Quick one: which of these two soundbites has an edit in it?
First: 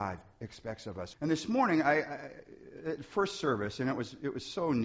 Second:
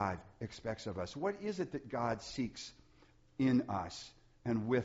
first; 1 cut; at 1.1 s

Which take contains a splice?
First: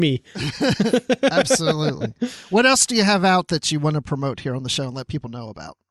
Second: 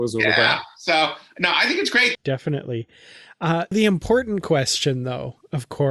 second; 2 cuts; at 2.1 s, 3.7 s

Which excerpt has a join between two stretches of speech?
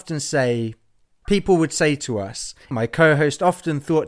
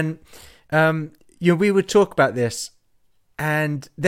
first; 2 cuts; at 1.2 s, 2.7 s

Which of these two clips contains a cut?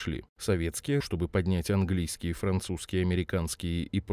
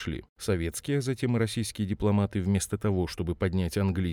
first; 1 cut; at 1.0 s

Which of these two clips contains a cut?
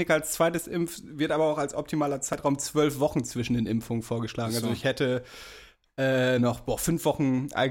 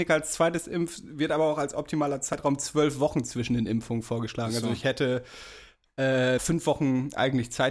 second; 1 cut; at 6.4 s

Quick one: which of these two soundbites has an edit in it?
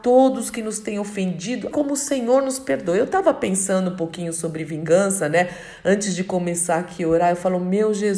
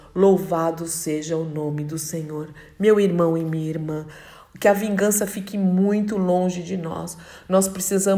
first; 1 cut; at 1.7 s

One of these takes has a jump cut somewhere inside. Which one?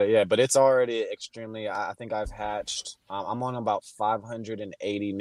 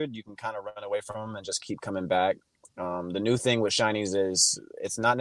first; 1 cut; at 3.0 s

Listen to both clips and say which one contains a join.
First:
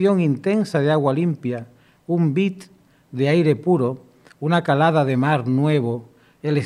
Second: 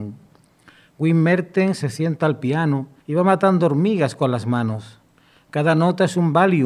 second; 2 cuts; at 1.8 s, 3.0 s

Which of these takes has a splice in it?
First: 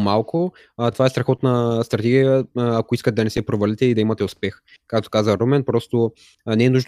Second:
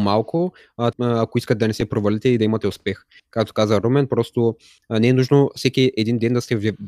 second; 1 cut; at 0.9 s

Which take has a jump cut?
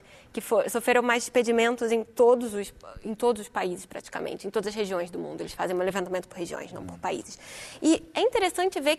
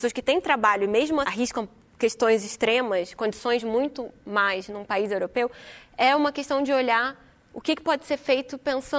second; 1 cut; at 1.2 s

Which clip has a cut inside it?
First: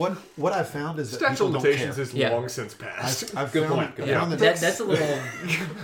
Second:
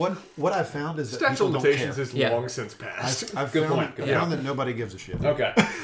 first; 1 cut; at 4.4 s

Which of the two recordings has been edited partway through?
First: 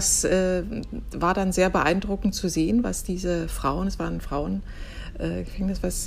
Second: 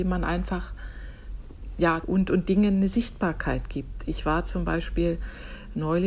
second; 1 cut; at 2.0 s

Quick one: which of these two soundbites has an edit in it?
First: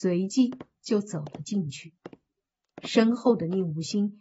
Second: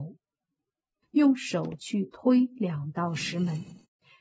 second; 1 cut; at 1.0 s

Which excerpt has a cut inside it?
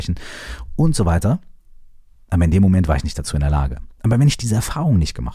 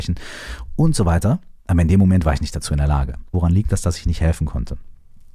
second; 2 cuts; at 1.6 s, 3.3 s

